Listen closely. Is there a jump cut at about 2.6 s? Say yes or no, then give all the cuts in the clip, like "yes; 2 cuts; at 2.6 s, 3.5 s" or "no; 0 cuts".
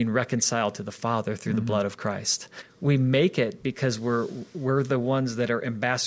yes; 1 cut; at 2.6 s